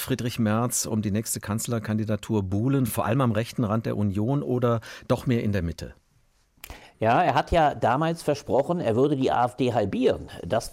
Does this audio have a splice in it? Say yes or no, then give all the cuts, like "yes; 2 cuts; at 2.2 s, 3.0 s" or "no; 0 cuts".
no; 0 cuts